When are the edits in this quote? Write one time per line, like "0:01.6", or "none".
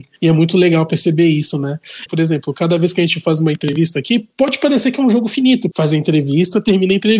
0:02.1
0:05.7